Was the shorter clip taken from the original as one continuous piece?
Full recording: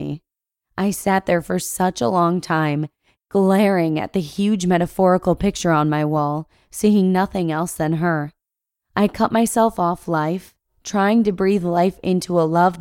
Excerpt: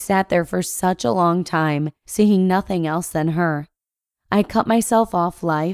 no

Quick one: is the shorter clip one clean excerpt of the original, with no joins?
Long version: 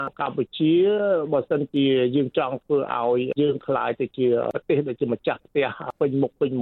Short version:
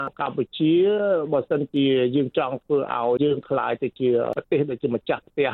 no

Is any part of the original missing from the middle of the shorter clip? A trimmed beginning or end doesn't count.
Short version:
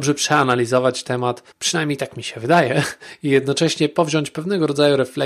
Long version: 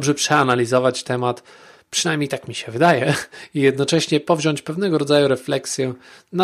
yes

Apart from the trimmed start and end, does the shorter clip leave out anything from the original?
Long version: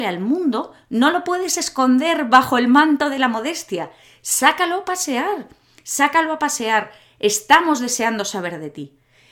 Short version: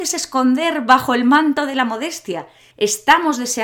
yes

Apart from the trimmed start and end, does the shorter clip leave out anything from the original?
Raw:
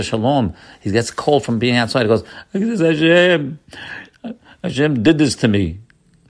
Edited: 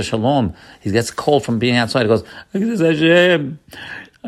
no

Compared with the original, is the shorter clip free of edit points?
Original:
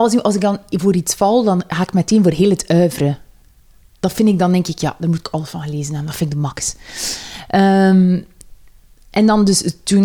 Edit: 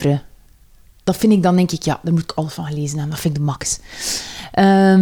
yes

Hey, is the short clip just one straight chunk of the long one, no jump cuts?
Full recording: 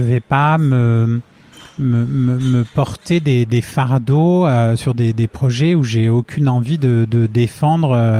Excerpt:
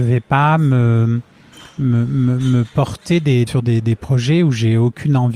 no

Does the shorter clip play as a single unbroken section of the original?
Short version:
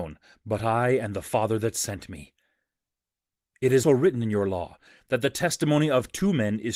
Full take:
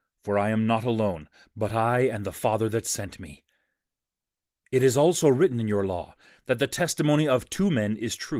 no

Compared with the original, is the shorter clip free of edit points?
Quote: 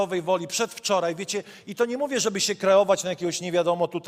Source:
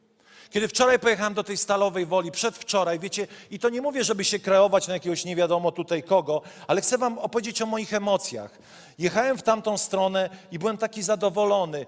yes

